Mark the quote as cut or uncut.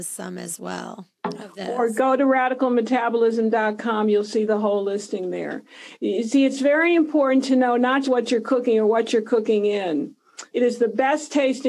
cut